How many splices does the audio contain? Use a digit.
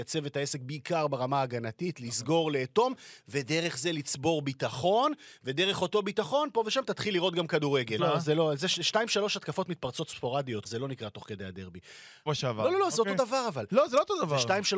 3